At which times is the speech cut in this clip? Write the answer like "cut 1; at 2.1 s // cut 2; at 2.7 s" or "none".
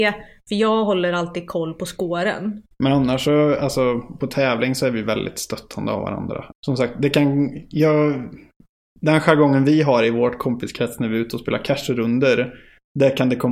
cut 1; at 2.7 s // cut 2; at 6.5 s